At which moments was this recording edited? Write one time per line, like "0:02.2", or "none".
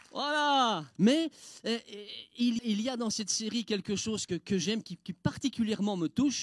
0:01.0
0:02.6
0:04.3